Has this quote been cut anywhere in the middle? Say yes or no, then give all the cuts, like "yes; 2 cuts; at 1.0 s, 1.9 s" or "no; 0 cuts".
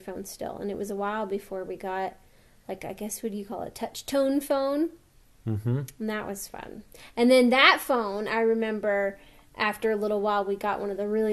no; 0 cuts